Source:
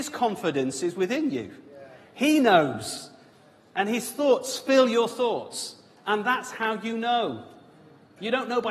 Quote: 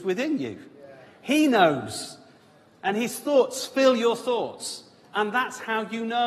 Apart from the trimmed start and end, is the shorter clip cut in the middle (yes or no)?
no